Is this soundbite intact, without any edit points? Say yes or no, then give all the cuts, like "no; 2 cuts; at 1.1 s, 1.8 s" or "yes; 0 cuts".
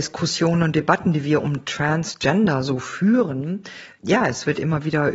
yes; 0 cuts